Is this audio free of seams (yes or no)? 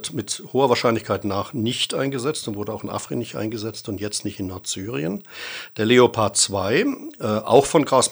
yes